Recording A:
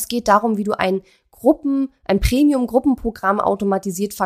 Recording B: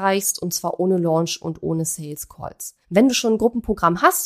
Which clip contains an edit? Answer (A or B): B